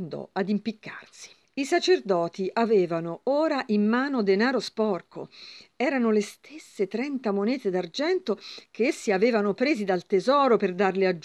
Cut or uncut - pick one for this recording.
uncut